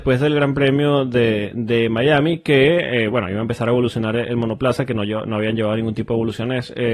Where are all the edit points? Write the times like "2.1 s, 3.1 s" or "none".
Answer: none